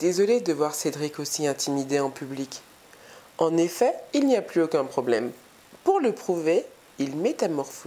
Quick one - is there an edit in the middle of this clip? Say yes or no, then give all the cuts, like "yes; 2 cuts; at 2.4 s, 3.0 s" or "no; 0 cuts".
yes; 1 cut; at 4.1 s